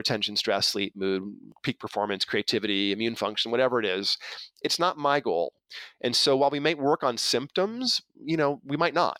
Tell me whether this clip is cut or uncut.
uncut